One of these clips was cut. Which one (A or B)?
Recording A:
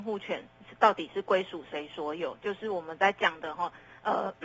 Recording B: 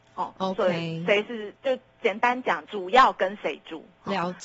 B